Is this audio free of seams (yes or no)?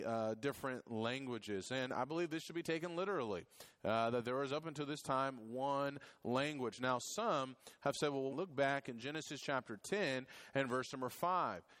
no